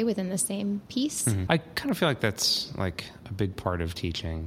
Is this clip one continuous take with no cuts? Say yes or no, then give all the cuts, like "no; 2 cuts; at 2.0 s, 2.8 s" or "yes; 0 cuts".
no; 1 cut; at 1.5 s